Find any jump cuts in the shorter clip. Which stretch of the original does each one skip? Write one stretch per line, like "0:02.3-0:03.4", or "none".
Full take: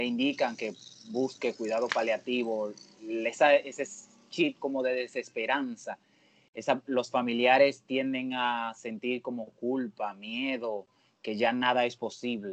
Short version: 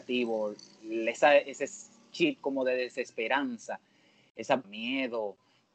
0:06.8-0:10.1